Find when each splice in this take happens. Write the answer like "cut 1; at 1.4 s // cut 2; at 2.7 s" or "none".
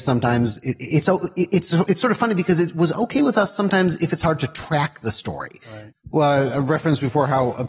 cut 1; at 5.9 s